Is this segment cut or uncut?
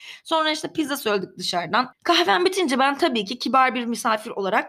cut